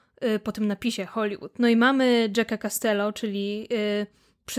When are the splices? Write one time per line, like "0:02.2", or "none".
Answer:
none